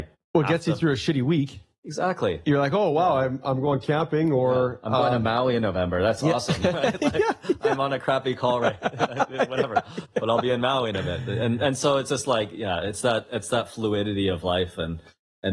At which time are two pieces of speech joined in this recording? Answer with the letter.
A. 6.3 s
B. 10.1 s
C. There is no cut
C